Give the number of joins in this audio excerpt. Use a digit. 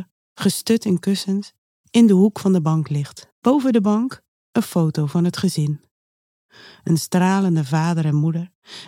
1